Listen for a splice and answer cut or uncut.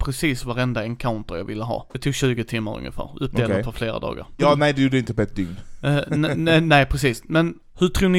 cut